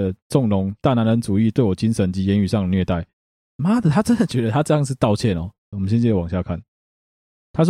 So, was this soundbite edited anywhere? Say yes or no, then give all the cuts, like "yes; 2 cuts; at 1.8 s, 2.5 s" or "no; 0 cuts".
yes; 2 cuts; at 3.3 s, 5.7 s